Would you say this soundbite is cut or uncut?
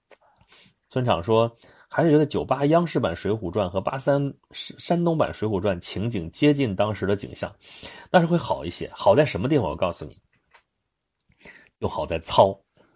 uncut